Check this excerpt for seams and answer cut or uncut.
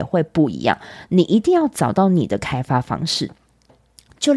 uncut